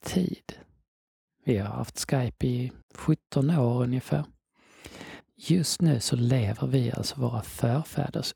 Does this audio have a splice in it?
yes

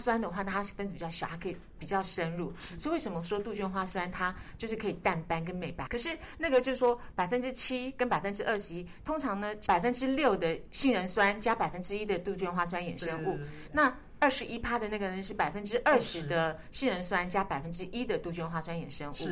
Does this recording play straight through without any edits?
no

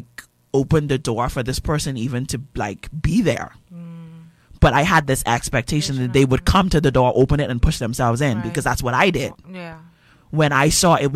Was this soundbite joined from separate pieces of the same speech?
no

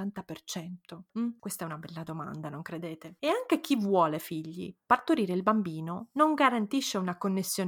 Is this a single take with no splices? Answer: no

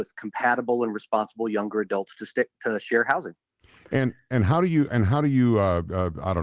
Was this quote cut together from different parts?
no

